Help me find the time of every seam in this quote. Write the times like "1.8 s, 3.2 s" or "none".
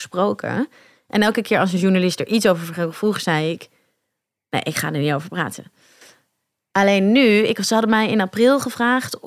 none